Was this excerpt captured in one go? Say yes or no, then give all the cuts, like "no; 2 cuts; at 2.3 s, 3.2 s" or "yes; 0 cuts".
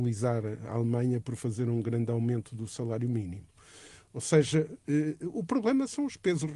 yes; 0 cuts